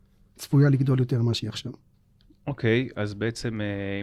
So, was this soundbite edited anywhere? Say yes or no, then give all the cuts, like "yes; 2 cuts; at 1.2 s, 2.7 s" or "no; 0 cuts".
no; 0 cuts